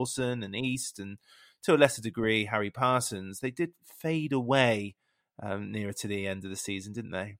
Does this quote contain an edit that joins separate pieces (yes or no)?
no